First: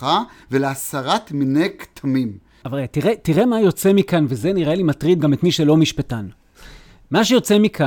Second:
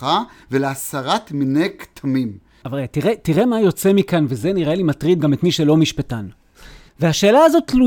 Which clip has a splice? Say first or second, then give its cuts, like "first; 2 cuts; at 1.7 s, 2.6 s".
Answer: second; 1 cut; at 6.9 s